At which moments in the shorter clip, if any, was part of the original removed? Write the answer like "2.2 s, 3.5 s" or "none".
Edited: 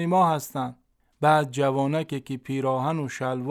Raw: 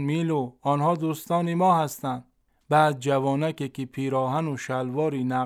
none

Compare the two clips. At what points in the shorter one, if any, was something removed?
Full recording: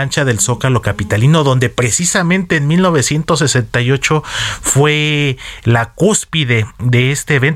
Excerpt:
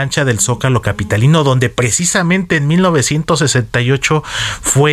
none

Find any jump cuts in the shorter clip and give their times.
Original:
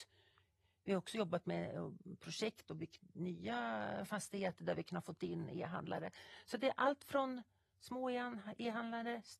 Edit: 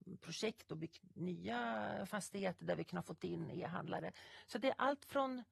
none

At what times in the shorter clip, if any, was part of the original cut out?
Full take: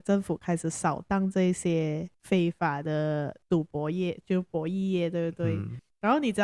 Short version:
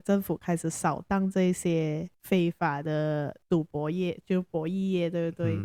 none

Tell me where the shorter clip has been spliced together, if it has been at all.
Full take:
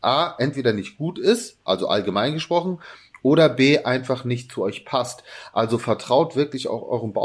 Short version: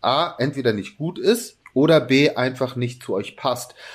1.6 s

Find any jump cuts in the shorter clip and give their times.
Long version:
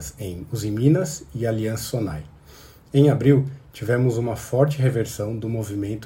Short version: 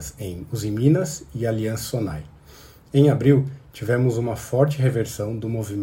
none

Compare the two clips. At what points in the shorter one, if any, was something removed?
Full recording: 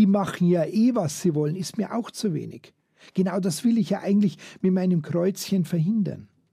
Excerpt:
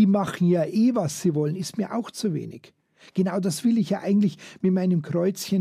none

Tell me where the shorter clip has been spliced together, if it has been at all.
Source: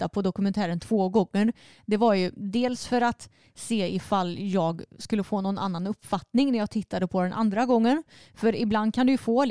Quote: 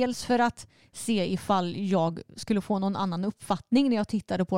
none

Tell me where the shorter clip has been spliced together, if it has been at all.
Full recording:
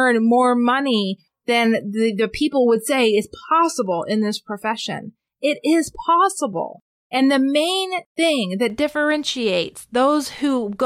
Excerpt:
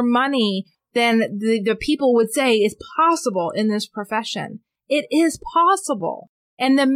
none

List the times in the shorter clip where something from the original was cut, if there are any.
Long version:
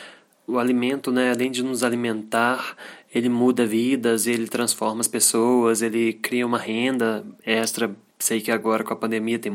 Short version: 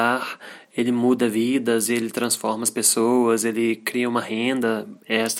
none

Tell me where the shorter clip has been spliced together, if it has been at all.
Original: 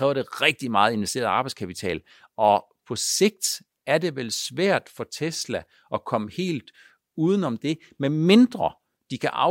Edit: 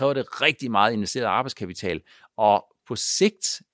none

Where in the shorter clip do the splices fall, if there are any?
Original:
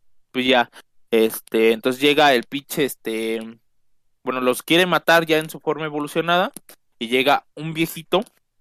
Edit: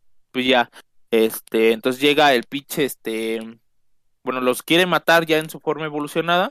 none

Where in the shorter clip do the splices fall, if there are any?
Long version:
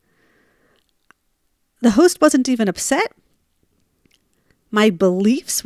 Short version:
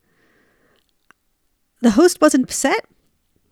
2.4 s

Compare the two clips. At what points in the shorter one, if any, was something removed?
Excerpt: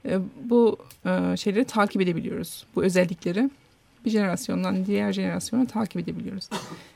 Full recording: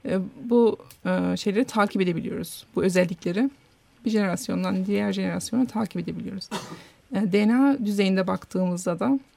none

